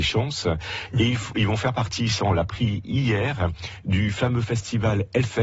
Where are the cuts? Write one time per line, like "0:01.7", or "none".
none